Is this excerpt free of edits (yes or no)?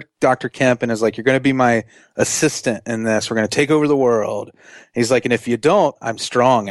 yes